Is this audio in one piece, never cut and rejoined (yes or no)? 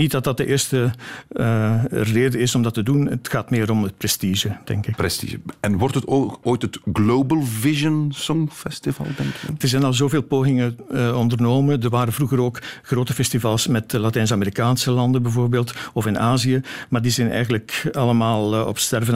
no